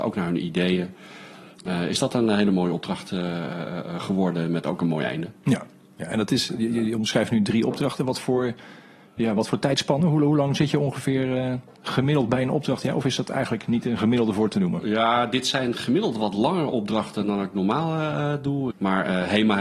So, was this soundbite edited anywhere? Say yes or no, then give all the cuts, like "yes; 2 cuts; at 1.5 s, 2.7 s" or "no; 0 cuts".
yes; 1 cut; at 18.7 s